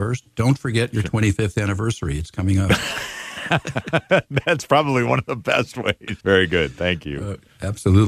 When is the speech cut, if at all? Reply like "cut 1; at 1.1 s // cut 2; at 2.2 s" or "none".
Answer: cut 1; at 6.2 s